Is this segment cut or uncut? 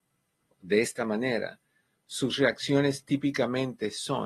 uncut